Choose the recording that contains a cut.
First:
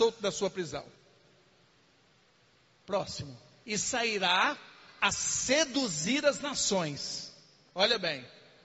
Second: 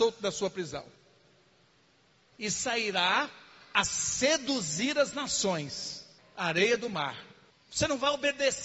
second; 3 cuts; at 2.3 s, 6.2 s, 7.5 s

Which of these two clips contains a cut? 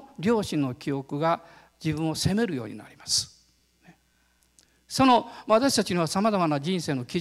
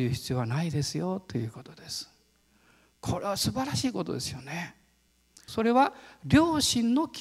second; 1 cut; at 5.5 s

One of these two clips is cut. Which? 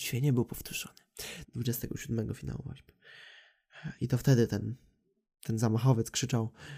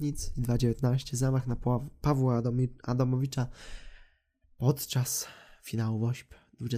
first; 1 cut; at 1.4 s

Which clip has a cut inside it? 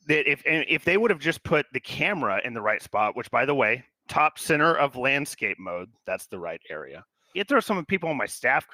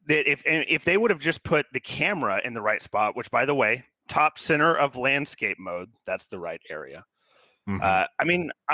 first; 1 cut; at 7.3 s

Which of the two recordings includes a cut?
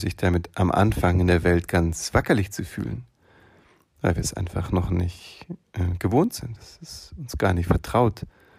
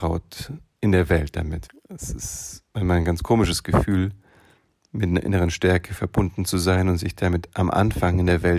second; 1 cut; at 1.7 s

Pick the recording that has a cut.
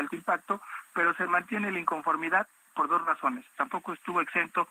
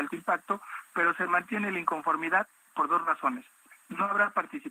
first; 1 cut; at 3.5 s

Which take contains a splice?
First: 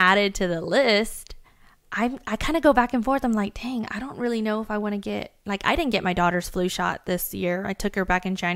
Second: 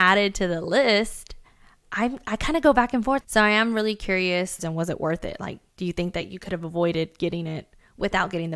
second; 2 cuts; at 3.2 s, 4.6 s

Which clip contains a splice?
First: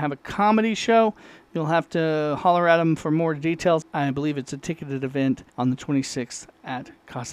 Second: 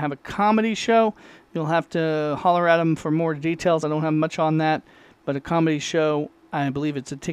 first; 2 cuts; at 3.8 s, 5.5 s

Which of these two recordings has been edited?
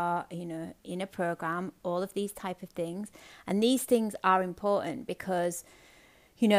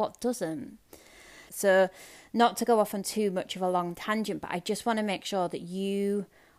second; 1 cut; at 1.5 s

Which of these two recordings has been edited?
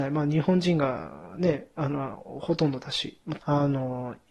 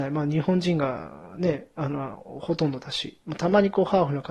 first; 1 cut; at 3.4 s

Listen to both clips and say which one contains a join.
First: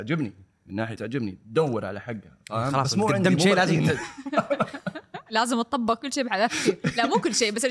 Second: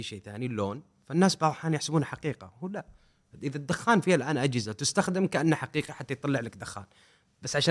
first; 1 cut; at 1.0 s

